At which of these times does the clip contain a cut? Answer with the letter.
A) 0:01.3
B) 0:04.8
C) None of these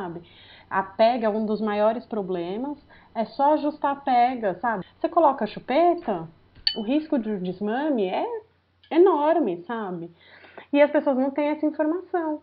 B